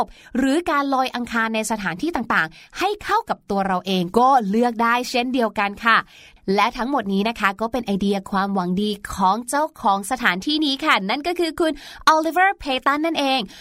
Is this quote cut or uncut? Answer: uncut